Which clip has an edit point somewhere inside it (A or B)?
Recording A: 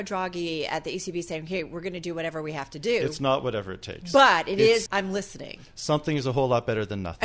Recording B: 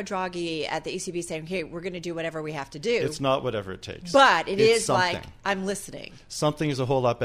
A